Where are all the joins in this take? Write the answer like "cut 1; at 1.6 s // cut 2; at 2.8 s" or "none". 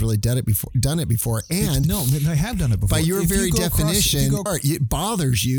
cut 1; at 4.5 s